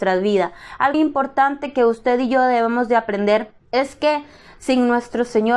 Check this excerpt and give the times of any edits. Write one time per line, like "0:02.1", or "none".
0:00.9
0:03.6